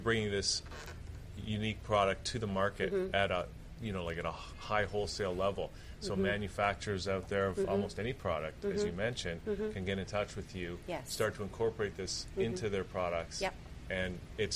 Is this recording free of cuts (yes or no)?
yes